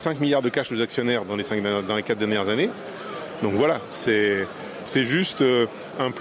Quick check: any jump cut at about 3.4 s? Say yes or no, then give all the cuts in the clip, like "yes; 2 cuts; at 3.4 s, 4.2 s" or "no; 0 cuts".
no; 1 cut; at 4.9 s